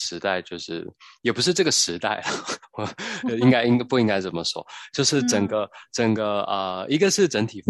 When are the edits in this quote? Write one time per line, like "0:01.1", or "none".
none

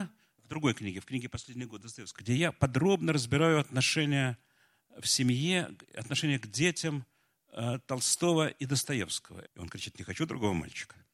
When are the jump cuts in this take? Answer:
0:02.2
0:09.4

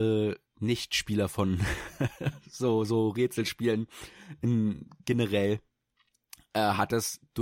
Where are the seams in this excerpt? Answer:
none

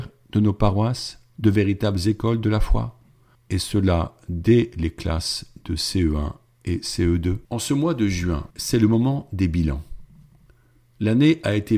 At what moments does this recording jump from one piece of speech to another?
0:03.4
0:07.4
0:08.5

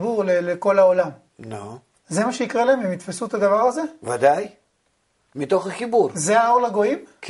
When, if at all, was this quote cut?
0:02.0

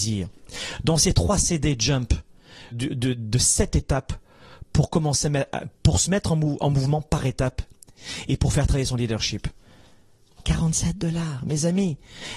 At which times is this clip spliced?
0:02.7
0:10.3

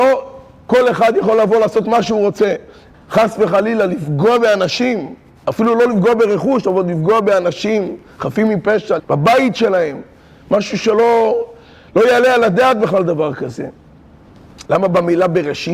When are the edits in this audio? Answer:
0:02.9
0:09.0
0:14.7

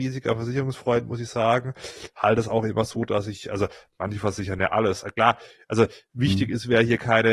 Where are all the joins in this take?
none

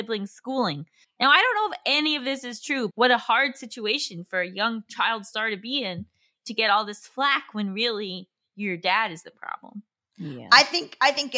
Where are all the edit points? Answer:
0:01.0
0:02.9

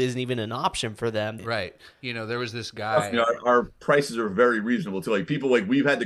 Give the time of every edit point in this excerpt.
0:01.4

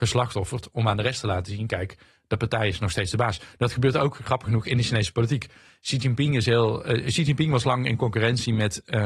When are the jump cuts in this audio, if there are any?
none

